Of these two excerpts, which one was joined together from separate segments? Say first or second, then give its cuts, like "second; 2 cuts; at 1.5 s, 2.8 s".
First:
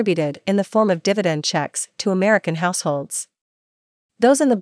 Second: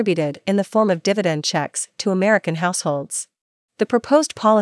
second; 1 cut; at 3.7 s